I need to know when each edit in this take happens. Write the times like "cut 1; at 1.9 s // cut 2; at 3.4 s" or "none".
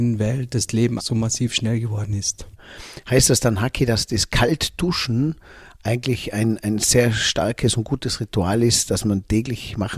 cut 1; at 1.0 s